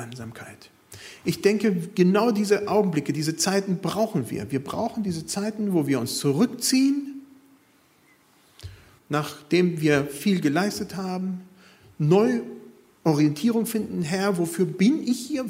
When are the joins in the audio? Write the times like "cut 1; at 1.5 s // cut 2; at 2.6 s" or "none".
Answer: cut 1; at 9.0 s